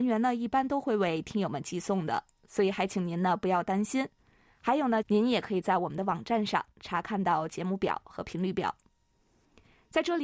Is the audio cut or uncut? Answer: cut